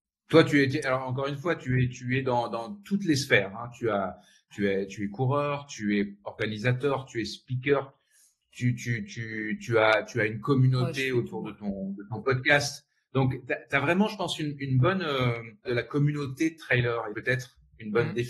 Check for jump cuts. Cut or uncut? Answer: cut